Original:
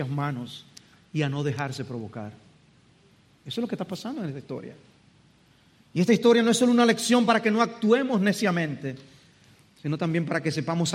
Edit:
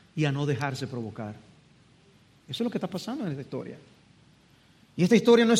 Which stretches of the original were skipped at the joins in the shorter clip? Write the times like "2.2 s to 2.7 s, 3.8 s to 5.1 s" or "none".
none